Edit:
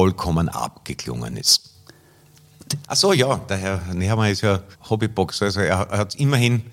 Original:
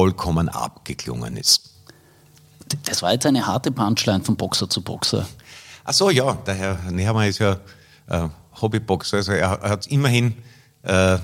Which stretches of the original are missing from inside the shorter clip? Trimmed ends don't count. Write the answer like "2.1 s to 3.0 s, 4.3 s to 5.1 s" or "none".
2.8 s to 5.8 s, 7.7 s to 8.4 s

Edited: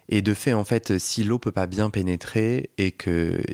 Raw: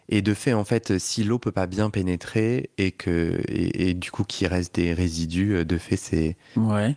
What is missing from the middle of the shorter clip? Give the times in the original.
none

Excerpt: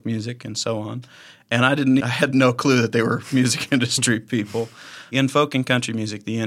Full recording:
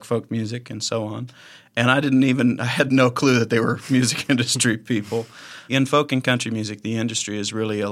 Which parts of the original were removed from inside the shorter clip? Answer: 2.3 s to 2.6 s

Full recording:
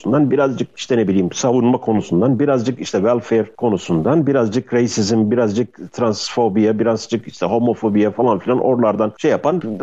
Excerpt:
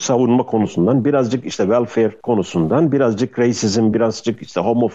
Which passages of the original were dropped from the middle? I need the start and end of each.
5.3 s to 6.8 s

